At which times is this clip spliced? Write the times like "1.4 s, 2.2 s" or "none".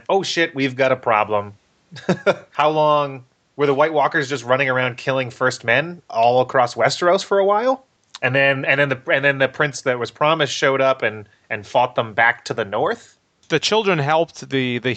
none